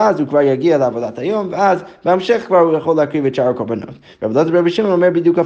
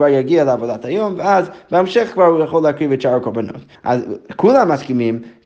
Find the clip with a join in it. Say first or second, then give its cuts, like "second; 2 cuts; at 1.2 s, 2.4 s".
second; 1 cut; at 3.7 s